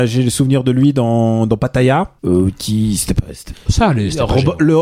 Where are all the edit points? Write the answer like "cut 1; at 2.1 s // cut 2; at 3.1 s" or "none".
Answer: cut 1; at 2.2 s // cut 2; at 3.5 s